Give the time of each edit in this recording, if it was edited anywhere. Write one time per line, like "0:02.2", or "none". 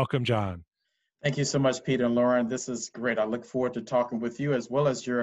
none